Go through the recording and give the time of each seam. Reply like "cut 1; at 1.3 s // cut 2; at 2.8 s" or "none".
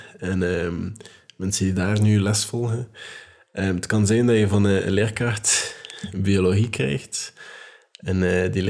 none